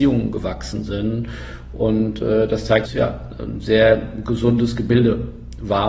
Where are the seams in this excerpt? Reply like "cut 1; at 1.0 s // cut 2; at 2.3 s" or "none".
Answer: cut 1; at 2.9 s